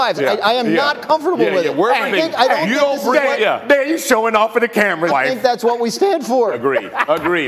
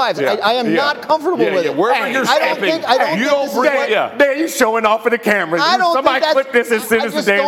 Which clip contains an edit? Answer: first; 2 cuts; at 2.1 s, 5.1 s

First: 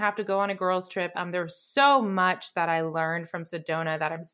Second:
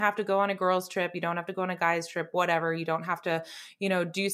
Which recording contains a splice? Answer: first; 1 cut; at 1.1 s

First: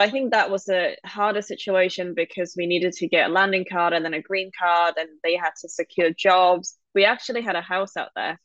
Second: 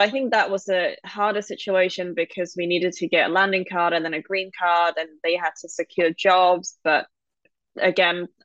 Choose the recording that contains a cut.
second; 1 cut; at 6.8 s

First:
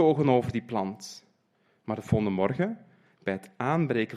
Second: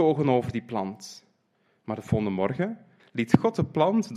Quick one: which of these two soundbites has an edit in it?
second; 1 cut; at 3.0 s

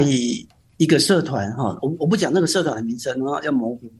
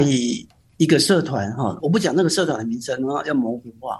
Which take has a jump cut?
second; 1 cut; at 1.8 s

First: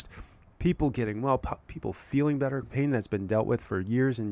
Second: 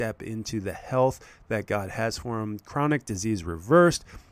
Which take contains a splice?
first; 1 cut; at 2.6 s

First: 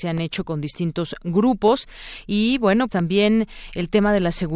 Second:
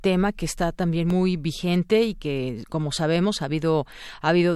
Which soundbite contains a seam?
first; 1 cut; at 2.9 s

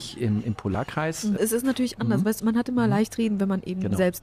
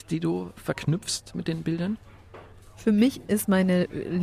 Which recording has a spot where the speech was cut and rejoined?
first; 2 cuts; at 1.4 s, 2.4 s

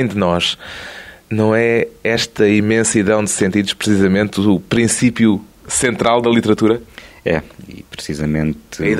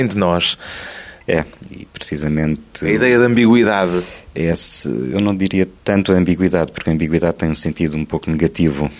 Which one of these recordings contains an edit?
second; 1 cut; at 1.2 s

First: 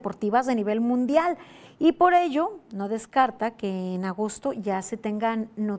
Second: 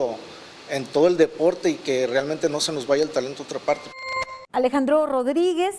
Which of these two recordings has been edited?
second; 1 cut; at 4.5 s

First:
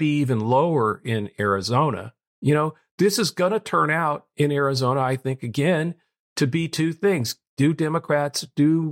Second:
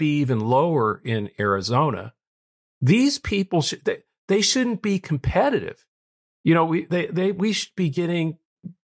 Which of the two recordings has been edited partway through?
first; 1 cut; at 2.3 s

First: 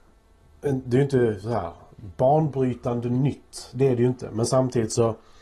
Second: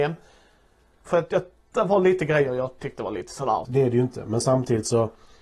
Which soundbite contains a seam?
second; 2 cuts; at 1.1 s, 3.6 s

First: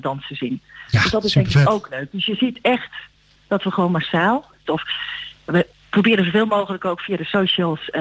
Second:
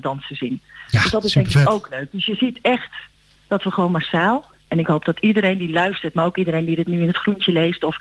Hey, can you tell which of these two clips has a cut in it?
first; 1 cut; at 4.7 s

